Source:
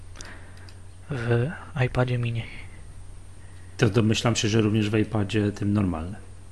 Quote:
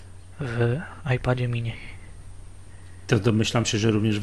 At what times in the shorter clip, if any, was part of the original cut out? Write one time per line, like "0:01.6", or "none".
none